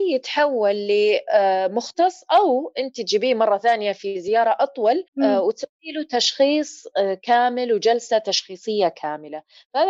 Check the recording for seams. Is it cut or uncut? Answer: cut